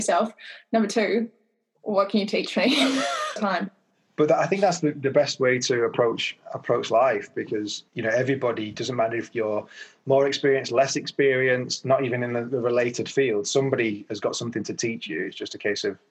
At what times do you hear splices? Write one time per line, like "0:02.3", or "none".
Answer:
0:03.4
0:07.9